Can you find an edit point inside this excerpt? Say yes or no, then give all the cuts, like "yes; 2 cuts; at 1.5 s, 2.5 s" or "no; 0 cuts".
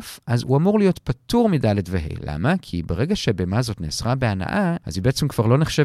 no; 0 cuts